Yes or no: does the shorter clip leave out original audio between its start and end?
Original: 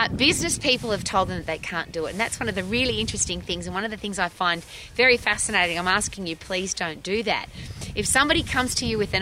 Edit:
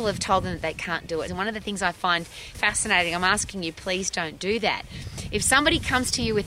yes